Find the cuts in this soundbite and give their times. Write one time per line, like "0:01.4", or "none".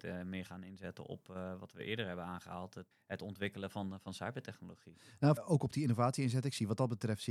0:02.9
0:05.4